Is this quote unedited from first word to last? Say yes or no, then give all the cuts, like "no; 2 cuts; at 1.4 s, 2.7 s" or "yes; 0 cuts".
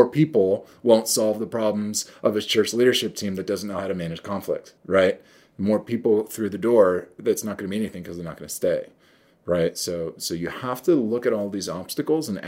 no; 1 cut; at 4.8 s